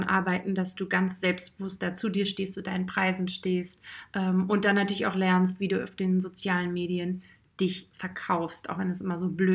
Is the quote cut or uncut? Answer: uncut